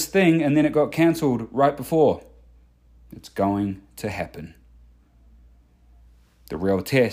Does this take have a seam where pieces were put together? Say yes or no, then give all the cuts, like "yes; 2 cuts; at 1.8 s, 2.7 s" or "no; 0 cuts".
no; 0 cuts